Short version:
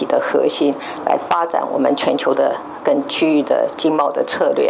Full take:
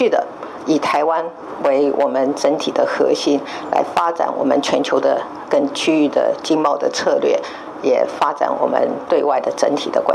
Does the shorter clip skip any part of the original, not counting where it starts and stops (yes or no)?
no